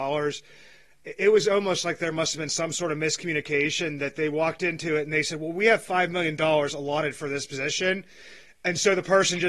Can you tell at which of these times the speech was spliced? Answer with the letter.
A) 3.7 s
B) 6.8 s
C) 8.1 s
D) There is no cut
D